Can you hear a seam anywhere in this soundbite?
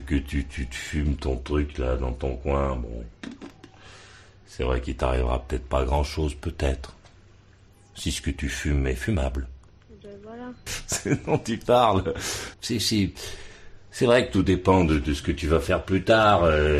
yes; 2 cuts; at 10.7 s, 12.5 s

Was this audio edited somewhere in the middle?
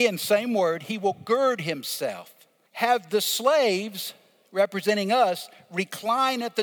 yes; 1 cut; at 2.7 s

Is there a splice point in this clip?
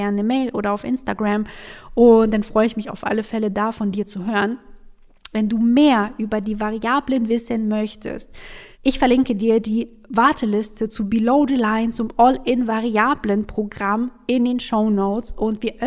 yes; 2 cuts; at 5.3 s, 8.7 s

